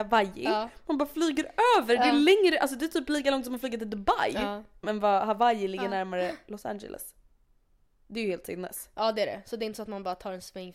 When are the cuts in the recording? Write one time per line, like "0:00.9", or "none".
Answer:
0:04.8